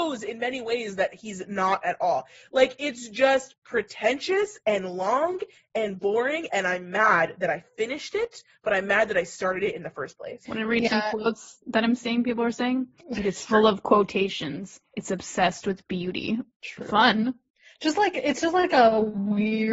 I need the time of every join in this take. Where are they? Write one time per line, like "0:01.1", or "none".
0:13.0

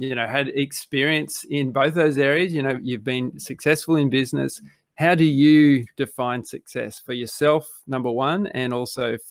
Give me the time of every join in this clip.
0:04.9

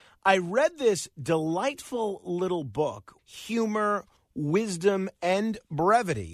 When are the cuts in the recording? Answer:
0:03.2

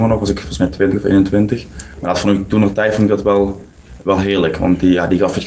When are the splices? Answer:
none

